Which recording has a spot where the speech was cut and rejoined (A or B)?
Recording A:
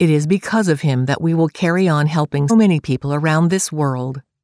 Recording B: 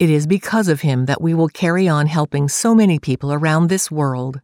A